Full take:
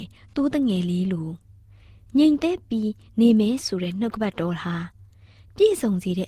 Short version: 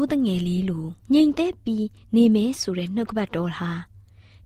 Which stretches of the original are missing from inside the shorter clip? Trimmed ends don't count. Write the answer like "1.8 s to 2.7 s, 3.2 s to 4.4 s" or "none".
1.5 s to 2.1 s